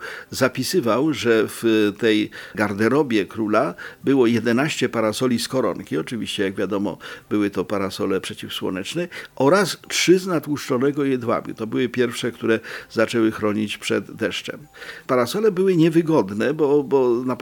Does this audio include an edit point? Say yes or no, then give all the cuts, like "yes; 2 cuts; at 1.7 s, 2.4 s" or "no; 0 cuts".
no; 0 cuts